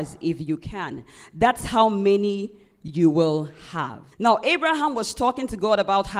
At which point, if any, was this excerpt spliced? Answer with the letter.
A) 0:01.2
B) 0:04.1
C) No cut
B